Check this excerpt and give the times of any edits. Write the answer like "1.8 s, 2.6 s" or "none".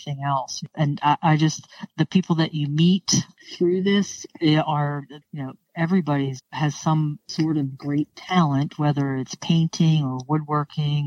5.2 s, 6.4 s